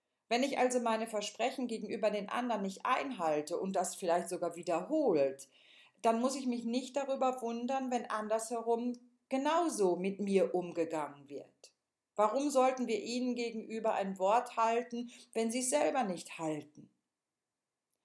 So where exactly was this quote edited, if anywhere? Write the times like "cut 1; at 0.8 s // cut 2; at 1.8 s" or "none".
none